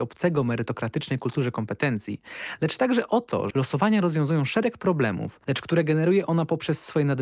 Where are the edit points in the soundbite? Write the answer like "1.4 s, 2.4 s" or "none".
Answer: 3.5 s, 5.4 s